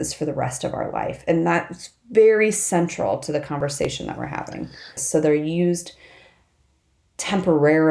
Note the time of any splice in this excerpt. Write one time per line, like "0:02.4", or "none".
0:05.0

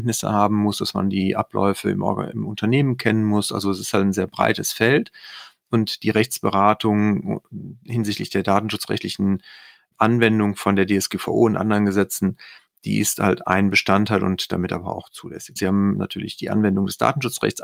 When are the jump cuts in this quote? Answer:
0:15.6

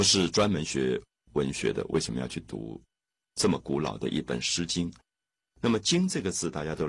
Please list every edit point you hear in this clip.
0:05.4

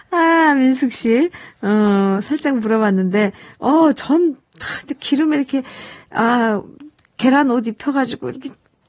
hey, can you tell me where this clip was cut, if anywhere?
none

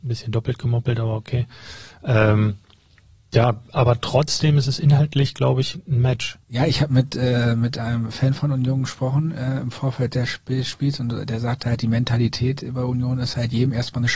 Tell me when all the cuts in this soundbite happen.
0:06.4

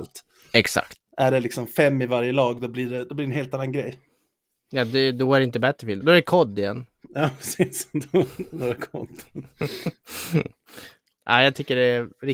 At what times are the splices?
0:06.0
0:11.2

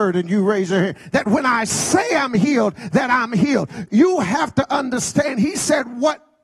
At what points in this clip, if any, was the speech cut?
0:01.1

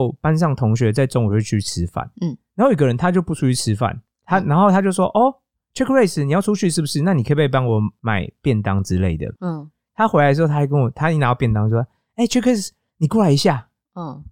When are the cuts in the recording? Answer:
0:09.4

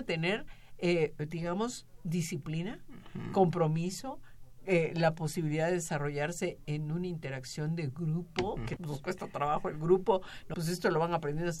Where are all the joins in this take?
0:08.8
0:10.5

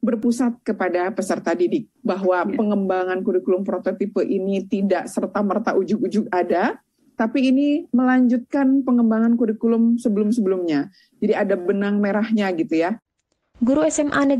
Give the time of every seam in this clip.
none

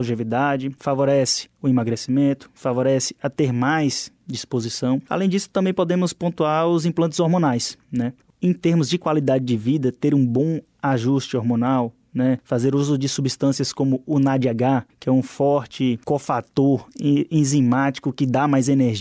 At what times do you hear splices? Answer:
none

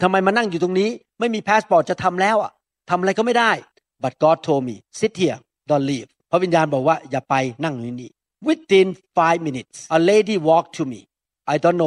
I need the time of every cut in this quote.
0:09.9

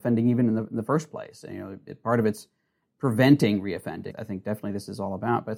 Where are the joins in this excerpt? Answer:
0:04.1

